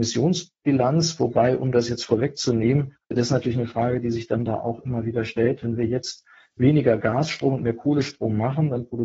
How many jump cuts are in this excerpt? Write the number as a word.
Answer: one